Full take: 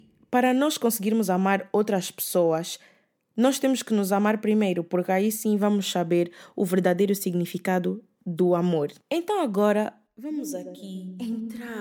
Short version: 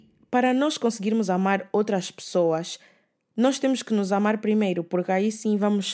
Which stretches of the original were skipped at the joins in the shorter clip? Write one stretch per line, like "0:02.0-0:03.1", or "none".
none

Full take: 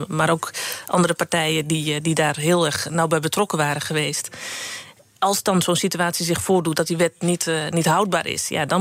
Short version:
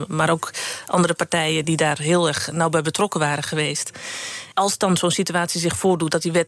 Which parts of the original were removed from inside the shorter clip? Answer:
0:01.6-0:02.0
0:04.9-0:05.2

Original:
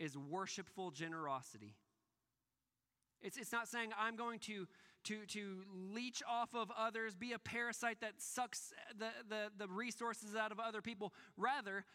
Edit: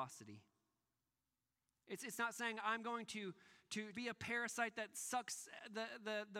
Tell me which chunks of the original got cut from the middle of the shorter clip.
0:05.3-0:07.2

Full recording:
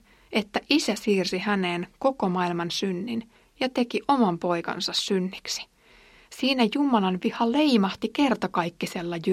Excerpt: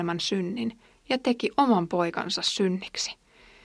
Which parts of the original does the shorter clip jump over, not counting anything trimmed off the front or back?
none

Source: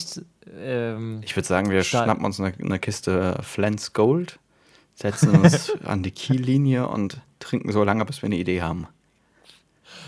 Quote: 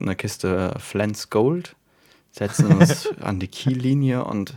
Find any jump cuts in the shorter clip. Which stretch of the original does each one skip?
none

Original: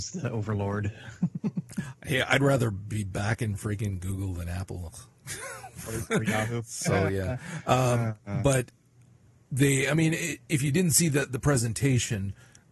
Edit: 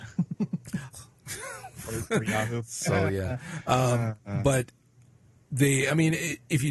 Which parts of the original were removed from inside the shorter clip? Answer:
0:02.0-0:04.9

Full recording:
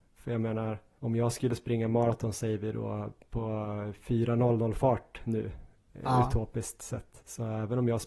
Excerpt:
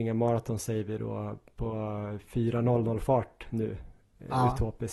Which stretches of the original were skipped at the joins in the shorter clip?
none

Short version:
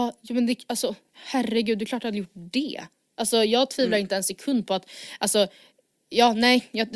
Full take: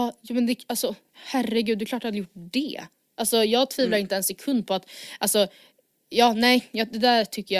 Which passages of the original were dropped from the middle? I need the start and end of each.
none

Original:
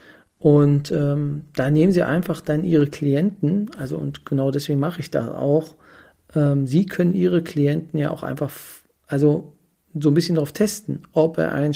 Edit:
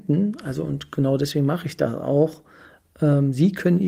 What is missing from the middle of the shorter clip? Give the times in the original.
none

